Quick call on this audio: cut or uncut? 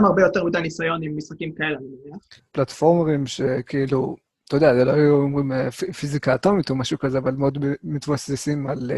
cut